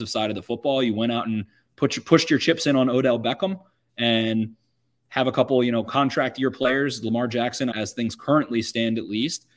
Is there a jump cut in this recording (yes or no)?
yes